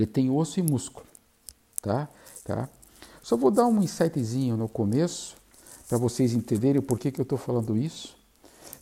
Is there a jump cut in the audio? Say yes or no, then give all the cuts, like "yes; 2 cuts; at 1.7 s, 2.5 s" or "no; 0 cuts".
yes; 1 cut; at 2.4 s